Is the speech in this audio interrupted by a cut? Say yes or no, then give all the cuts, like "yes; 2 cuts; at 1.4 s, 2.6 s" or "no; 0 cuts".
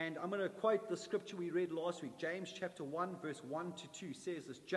no; 0 cuts